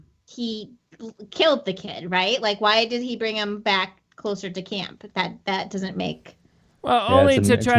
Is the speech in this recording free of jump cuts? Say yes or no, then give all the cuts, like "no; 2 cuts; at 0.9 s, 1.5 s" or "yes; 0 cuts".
yes; 0 cuts